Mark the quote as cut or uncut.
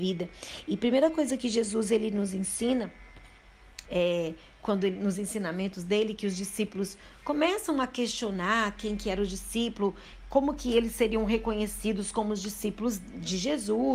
cut